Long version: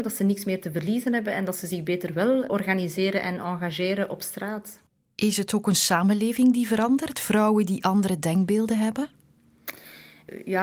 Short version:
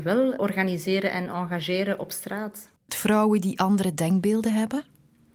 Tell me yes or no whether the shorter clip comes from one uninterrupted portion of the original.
no